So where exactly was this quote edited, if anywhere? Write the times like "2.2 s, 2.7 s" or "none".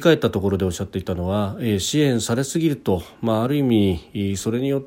none